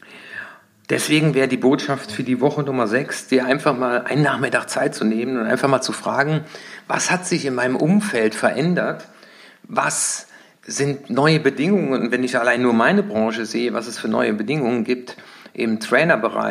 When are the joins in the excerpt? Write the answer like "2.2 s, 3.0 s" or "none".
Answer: none